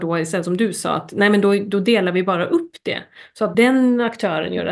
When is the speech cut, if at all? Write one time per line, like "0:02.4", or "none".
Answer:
0:03.5